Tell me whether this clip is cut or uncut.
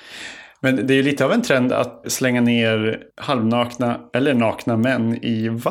cut